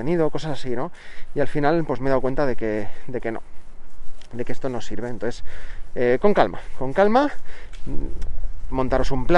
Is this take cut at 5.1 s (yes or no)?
no